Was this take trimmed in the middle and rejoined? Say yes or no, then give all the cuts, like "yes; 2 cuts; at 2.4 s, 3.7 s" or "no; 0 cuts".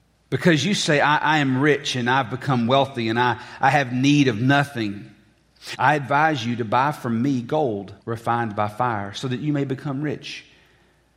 yes; 2 cuts; at 5.8 s, 8.0 s